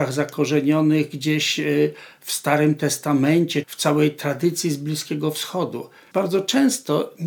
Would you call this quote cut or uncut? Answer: cut